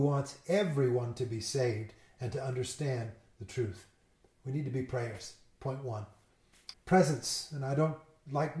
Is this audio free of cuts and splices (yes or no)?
no